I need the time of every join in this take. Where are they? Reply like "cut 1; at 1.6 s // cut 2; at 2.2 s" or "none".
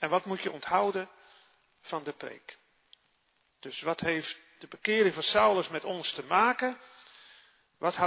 none